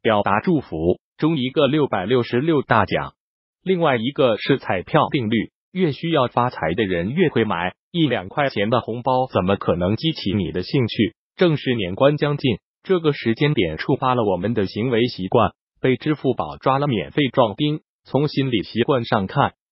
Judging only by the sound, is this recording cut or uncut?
cut